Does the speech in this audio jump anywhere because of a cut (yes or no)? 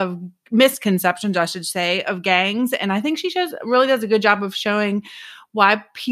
no